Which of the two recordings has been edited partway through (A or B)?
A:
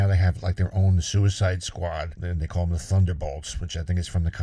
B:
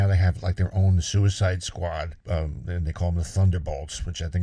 A